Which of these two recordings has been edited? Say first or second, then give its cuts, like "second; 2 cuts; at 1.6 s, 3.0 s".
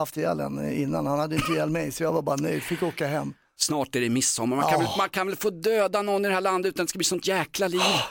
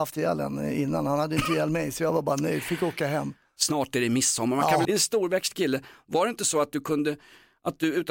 second; 1 cut; at 4.8 s